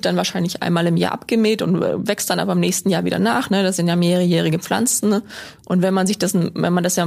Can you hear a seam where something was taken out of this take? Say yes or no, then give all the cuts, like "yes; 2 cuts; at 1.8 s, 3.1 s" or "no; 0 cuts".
no; 0 cuts